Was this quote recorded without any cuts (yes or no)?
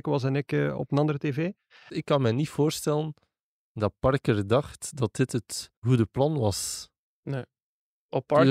no